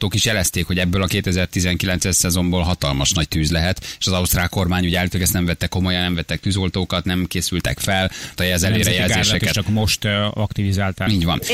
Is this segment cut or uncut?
cut